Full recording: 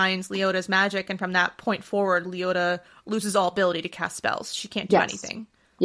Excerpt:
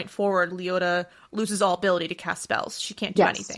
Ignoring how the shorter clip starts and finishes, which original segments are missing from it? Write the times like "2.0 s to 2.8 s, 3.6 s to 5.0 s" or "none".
none